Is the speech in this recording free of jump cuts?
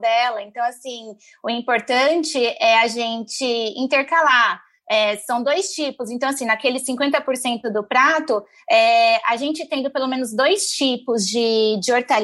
yes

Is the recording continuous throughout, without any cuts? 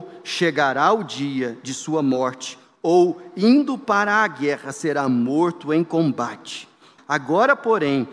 no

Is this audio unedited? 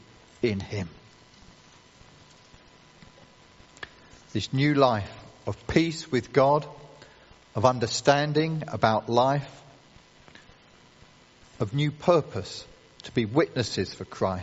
yes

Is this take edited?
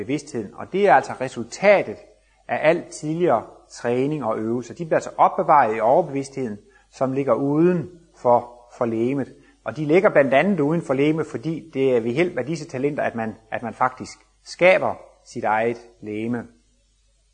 no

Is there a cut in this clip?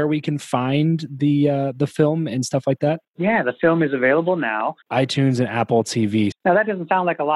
yes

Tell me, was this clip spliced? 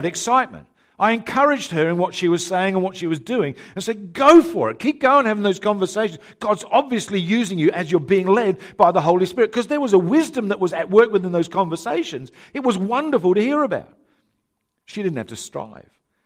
no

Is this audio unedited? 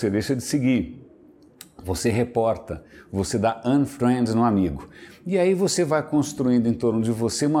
yes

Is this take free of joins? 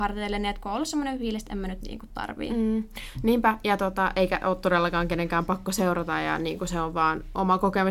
yes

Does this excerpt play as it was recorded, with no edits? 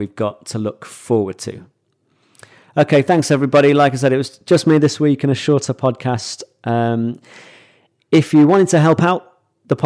yes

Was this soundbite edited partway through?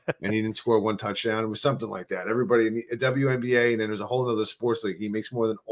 no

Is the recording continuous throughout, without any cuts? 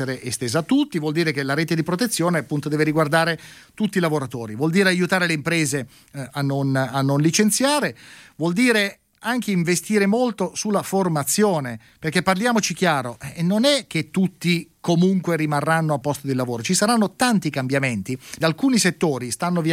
no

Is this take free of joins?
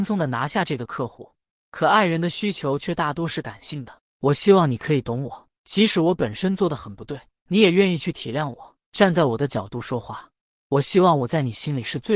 yes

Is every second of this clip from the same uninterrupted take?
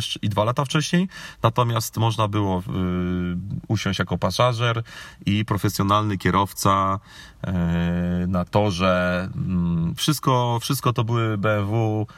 no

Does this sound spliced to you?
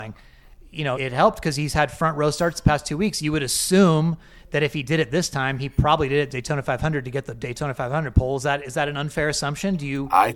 yes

